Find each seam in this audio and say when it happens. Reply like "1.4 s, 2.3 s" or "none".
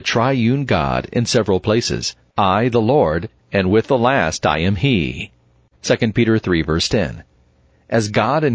3.4 s, 5.7 s